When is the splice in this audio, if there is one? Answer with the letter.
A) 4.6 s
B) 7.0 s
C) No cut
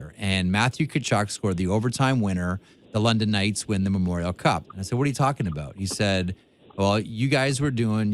A